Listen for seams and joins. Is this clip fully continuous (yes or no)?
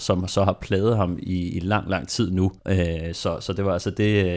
no